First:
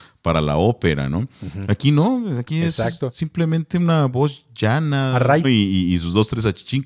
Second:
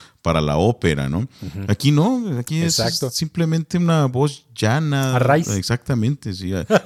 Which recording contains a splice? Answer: first; 1 cut; at 5.4 s

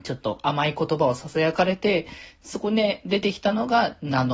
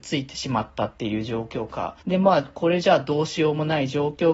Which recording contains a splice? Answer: second; 1 cut; at 2.0 s

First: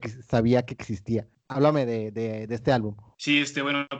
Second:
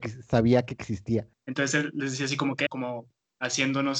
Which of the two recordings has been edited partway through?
second; 2 cuts; at 1.3 s, 2.7 s

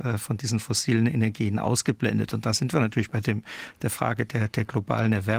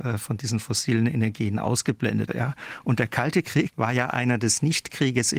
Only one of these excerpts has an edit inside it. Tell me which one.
second; 2 cuts; at 2.3 s, 3.7 s

